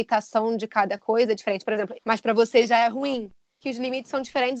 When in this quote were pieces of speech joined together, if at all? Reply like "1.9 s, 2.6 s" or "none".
1.9 s